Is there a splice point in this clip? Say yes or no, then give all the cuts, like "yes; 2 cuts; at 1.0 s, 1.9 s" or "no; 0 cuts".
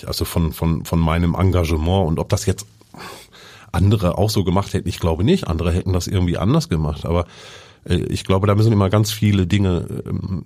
no; 0 cuts